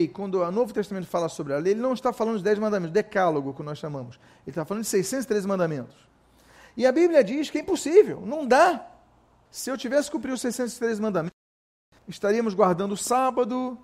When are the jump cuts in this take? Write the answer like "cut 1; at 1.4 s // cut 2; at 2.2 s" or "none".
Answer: cut 1; at 9.5 s // cut 2; at 12.0 s